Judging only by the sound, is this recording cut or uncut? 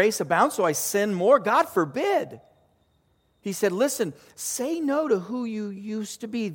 uncut